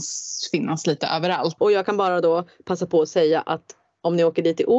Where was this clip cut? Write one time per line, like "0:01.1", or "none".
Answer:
0:01.6